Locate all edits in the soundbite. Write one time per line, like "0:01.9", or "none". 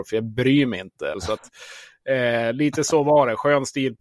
0:01.1

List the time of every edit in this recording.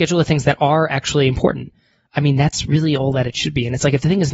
none

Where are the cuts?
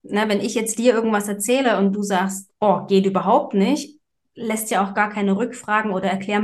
0:02.6

